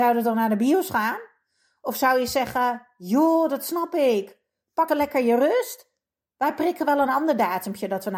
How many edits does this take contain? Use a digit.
1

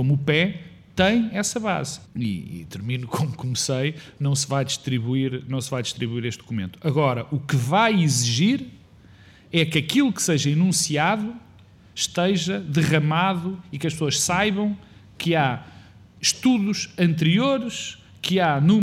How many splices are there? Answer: 1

